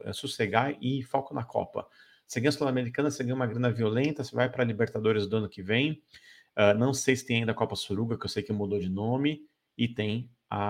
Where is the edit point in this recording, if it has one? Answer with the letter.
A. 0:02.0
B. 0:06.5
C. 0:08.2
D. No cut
D